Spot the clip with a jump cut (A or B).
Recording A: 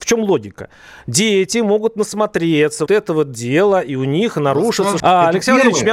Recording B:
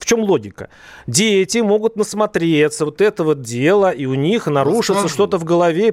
A